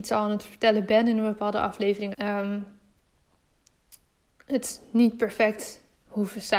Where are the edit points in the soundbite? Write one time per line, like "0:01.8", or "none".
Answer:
0:02.1